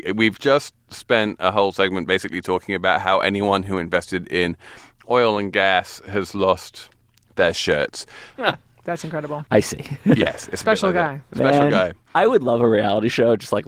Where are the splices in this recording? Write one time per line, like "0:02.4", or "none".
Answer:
0:08.4
0:09.5